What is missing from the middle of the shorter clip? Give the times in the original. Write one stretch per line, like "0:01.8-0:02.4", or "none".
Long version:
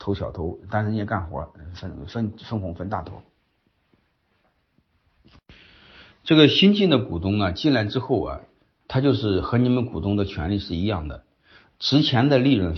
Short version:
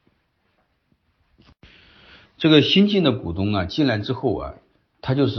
none